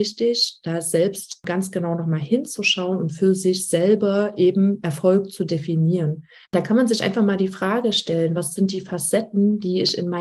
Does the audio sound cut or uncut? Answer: cut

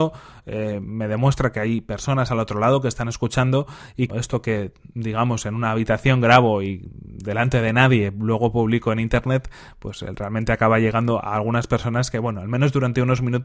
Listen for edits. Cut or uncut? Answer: cut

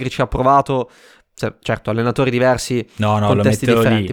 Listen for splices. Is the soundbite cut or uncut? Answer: uncut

